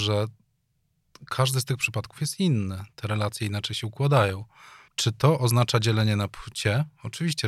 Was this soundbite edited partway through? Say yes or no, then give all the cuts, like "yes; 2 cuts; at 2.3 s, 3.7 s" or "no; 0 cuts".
yes; 1 cut; at 4.9 s